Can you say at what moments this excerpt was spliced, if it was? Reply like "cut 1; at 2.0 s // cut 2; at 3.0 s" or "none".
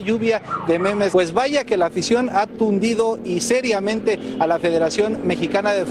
cut 1; at 1.1 s